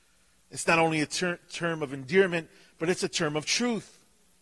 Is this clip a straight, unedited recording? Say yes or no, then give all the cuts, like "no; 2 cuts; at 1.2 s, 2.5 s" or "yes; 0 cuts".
yes; 0 cuts